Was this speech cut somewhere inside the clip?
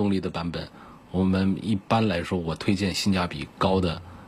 no; 0 cuts

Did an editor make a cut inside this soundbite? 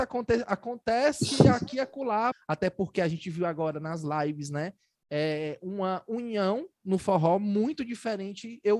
yes; 1 cut; at 2.3 s

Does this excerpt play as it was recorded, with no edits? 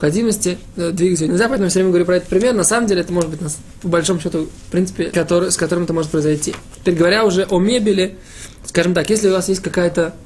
no; 1 cut; at 5.1 s

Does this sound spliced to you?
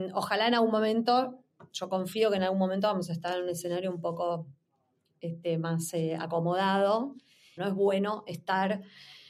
yes; 1 cut; at 7.6 s

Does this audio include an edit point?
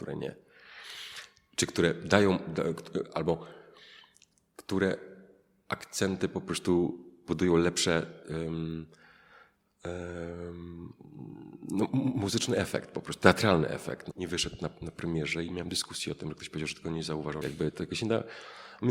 yes; 2 cuts; at 14.1 s, 17.4 s

